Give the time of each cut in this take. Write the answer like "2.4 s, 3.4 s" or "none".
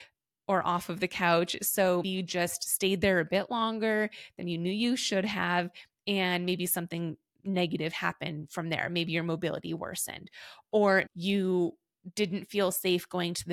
2.0 s, 11.1 s